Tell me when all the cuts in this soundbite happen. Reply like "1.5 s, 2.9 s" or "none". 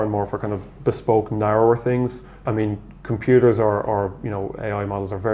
2.5 s